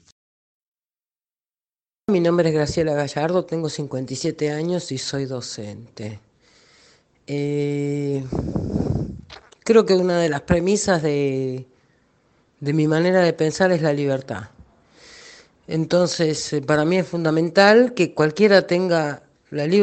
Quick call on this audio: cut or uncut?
uncut